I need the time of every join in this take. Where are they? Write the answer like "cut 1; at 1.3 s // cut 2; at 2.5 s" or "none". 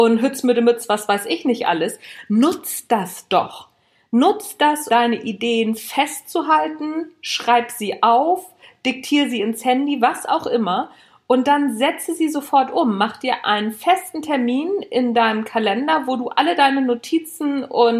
cut 1; at 4.9 s